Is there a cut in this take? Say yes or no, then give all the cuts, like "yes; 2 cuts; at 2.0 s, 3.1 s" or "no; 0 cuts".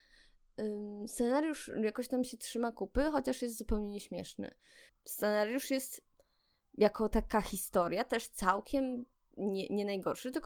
yes; 1 cut; at 4.9 s